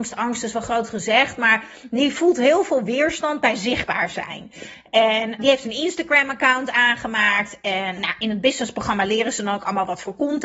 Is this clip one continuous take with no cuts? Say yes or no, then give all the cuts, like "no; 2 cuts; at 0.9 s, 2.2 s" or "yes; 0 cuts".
no; 2 cuts; at 5.4 s, 8.0 s